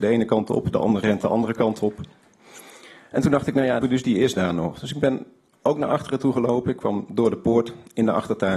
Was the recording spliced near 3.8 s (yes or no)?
yes